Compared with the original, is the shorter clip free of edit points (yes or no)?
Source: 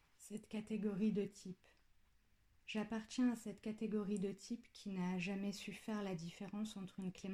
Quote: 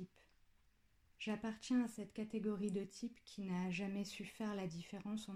yes